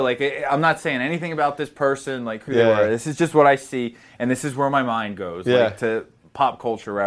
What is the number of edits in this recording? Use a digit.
0